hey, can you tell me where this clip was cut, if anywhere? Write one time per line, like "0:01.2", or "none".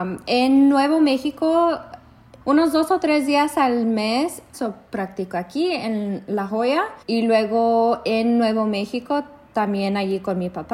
0:02.4
0:04.5
0:07.0